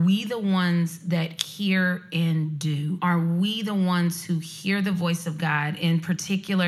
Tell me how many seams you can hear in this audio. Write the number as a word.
one